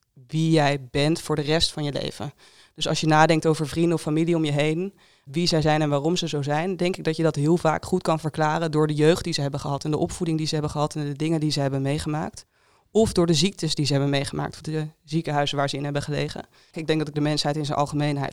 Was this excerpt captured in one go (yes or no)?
no